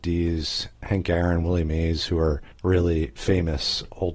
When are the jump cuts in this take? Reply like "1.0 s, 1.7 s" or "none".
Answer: 2.5 s